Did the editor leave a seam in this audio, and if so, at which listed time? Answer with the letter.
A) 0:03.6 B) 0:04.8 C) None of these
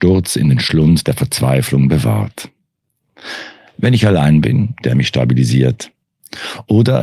B